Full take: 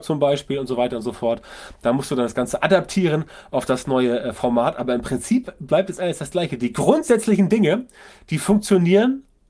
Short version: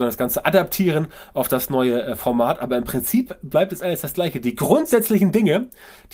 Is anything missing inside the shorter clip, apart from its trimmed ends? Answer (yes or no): no